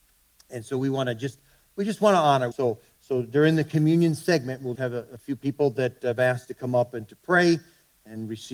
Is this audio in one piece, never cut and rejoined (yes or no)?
no